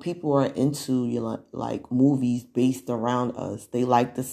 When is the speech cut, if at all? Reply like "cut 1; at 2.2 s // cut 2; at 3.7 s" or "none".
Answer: none